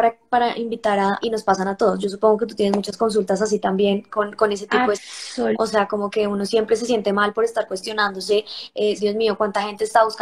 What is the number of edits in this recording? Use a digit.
3